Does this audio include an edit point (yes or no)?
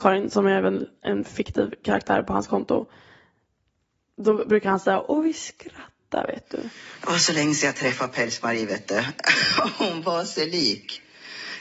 no